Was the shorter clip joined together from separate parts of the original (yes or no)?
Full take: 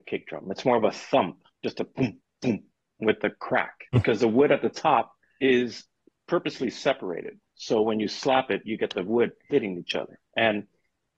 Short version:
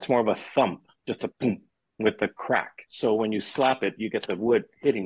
yes